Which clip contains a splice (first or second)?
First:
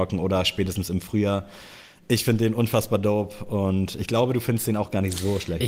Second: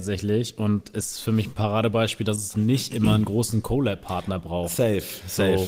second